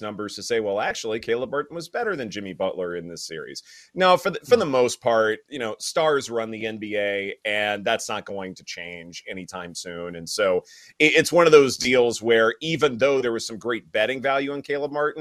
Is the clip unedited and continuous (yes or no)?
yes